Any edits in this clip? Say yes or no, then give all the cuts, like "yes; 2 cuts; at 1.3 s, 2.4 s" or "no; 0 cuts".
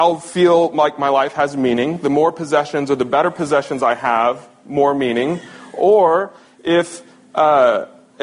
no; 0 cuts